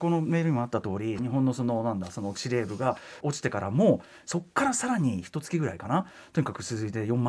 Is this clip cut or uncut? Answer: cut